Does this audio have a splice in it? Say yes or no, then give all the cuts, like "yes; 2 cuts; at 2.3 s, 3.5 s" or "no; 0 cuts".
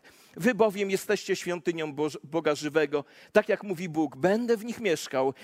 no; 0 cuts